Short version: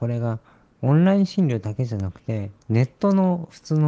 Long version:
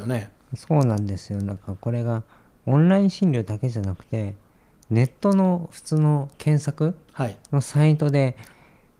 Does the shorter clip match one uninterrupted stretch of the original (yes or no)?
no